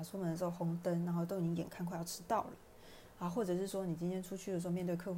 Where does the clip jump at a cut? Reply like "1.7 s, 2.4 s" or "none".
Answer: none